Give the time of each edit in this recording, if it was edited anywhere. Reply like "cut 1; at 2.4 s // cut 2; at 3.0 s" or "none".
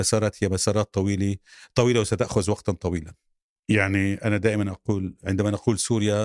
cut 1; at 3.6 s